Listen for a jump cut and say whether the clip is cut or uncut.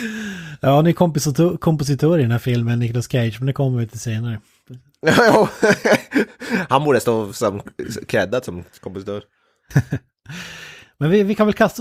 uncut